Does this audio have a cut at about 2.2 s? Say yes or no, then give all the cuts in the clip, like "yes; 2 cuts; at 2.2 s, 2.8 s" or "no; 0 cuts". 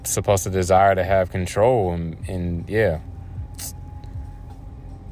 yes; 1 cut; at 2.2 s